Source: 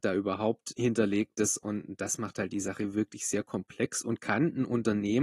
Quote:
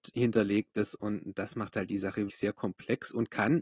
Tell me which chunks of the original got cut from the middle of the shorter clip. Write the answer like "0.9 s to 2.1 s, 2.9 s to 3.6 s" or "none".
2.9 s to 3.2 s